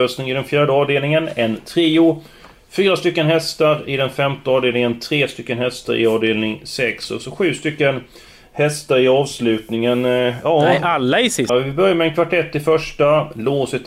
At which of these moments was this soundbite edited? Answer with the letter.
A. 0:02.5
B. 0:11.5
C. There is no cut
B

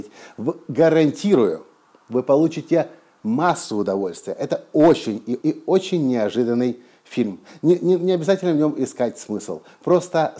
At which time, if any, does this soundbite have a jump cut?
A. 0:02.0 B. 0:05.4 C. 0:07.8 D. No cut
B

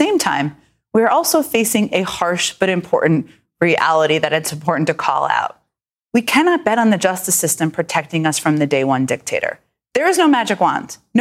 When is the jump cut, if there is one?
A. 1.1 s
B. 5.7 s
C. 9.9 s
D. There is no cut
D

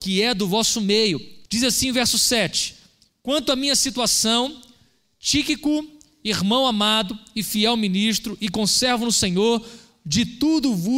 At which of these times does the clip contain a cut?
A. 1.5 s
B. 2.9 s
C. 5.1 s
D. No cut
A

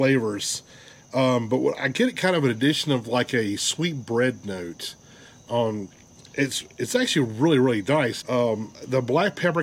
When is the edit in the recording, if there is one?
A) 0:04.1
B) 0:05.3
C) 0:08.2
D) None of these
C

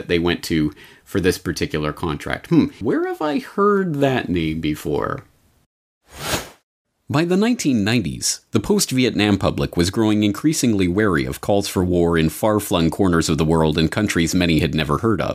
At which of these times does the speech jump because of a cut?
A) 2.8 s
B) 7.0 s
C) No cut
A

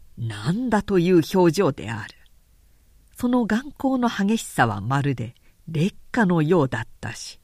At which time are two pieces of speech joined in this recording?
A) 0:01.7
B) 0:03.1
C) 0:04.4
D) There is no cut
D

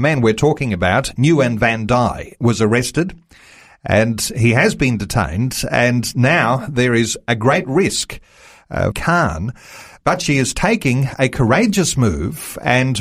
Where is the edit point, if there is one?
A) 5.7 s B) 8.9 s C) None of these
B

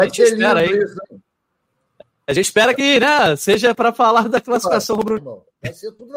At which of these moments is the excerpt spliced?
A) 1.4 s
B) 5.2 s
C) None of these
B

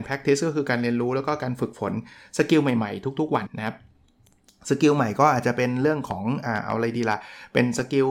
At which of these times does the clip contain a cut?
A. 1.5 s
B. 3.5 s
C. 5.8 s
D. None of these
B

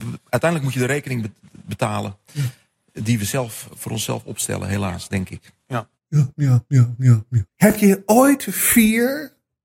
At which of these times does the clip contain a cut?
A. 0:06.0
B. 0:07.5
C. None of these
B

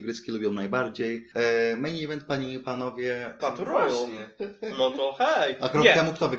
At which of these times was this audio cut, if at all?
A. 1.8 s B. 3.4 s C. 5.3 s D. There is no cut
B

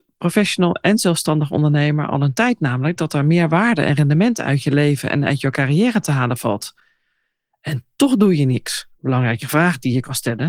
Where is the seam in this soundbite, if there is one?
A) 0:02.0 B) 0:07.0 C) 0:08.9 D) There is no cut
C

